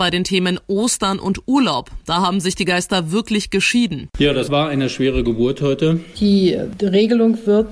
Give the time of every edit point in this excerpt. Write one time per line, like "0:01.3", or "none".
0:06.1